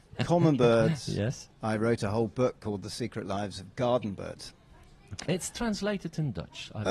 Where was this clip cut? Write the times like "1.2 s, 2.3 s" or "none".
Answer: 1.5 s, 5.3 s